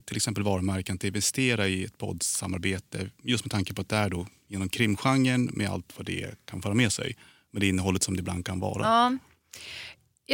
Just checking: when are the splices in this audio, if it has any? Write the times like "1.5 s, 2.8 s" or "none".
none